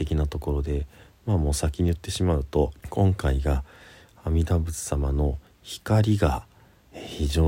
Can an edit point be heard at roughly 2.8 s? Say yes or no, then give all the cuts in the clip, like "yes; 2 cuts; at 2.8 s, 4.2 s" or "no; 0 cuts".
yes; 1 cut; at 2.8 s